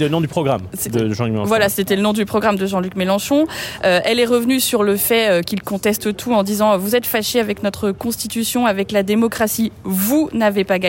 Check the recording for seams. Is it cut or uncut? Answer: uncut